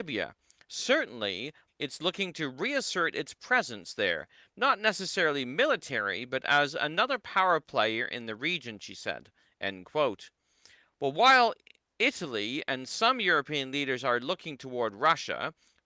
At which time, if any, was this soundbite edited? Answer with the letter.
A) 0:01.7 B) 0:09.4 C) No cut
A